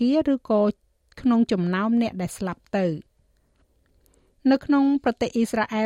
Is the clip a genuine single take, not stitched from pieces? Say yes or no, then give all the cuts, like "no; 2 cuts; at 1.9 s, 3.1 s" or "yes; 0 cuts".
yes; 0 cuts